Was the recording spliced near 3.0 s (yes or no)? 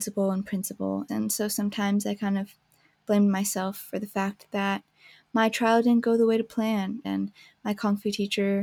no